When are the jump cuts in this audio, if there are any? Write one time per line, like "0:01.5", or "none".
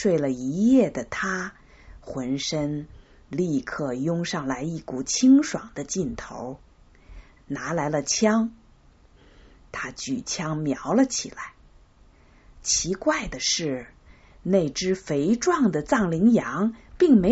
0:07.4